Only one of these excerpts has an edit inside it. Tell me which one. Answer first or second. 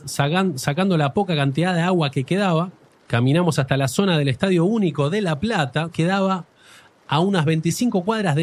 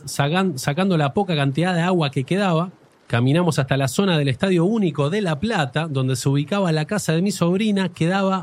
first